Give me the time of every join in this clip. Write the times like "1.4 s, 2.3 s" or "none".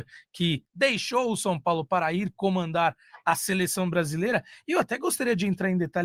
none